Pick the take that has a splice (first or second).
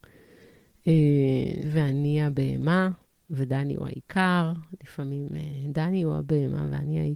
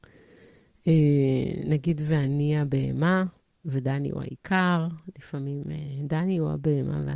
first